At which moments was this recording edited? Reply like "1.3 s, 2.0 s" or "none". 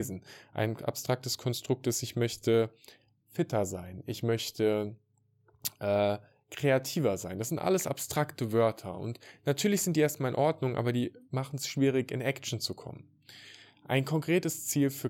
none